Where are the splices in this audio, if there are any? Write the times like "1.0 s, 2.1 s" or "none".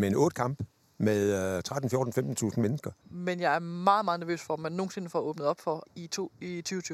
3.0 s, 5.9 s

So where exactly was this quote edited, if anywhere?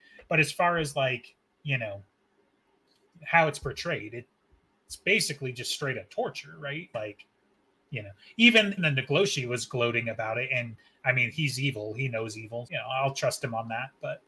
6.9 s, 8.8 s, 12.7 s

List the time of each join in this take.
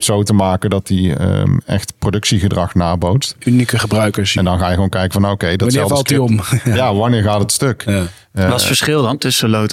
4.4 s

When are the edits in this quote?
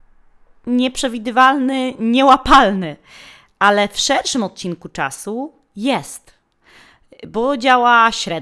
none

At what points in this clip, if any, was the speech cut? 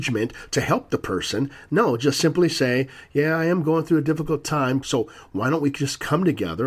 4.8 s

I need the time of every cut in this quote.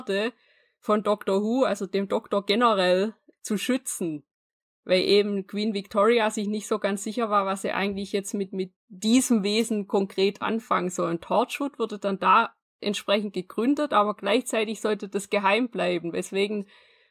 none

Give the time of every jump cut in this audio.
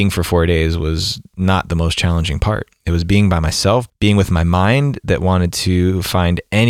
3.9 s

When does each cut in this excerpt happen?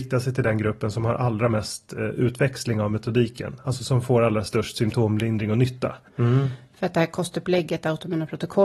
6.1 s

